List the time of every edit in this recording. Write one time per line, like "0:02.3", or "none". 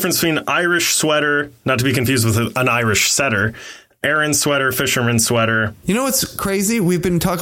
0:05.8